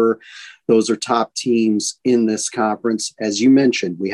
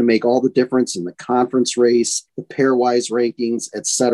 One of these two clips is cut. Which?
second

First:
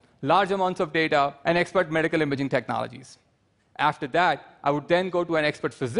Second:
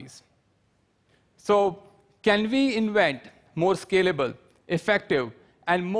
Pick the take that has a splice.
first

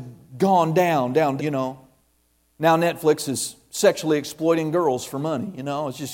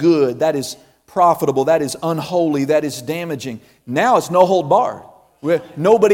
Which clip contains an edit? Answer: first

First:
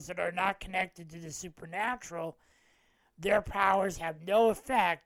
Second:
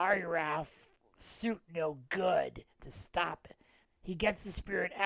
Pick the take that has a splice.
second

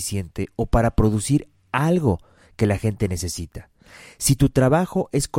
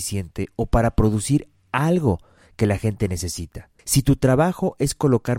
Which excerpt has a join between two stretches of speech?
second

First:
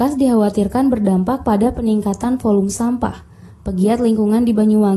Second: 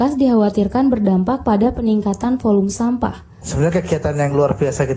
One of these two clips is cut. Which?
second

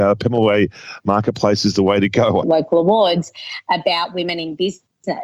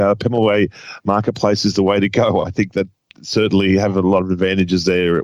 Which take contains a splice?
first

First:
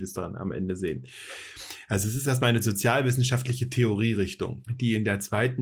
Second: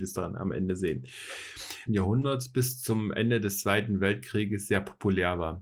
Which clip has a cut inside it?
second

